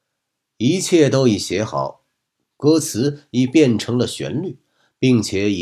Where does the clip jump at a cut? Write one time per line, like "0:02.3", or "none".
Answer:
0:02.4